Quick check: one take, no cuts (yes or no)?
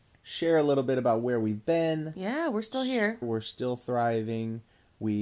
no